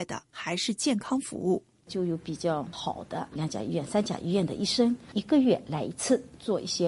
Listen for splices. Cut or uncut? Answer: uncut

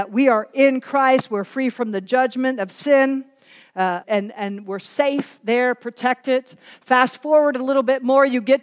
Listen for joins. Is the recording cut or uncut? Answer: cut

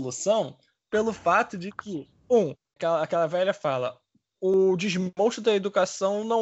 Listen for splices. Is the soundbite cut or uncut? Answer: uncut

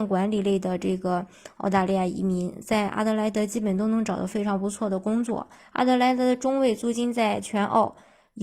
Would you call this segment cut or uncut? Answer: cut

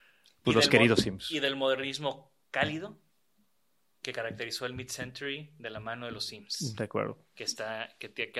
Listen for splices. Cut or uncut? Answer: uncut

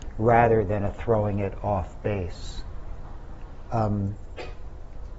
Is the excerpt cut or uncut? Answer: cut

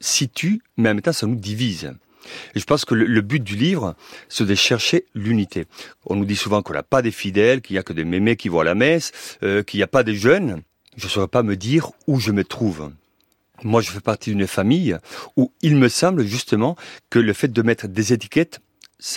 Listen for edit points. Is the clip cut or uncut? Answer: cut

